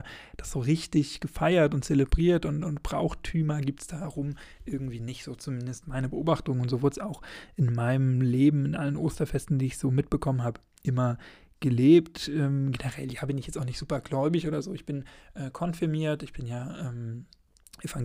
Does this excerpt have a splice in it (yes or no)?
no